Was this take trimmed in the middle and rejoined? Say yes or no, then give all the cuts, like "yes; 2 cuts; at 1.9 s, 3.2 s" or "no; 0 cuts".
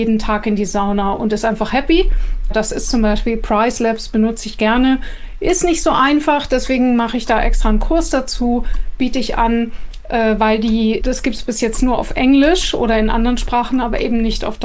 yes; 2 cuts; at 2.5 s, 11.0 s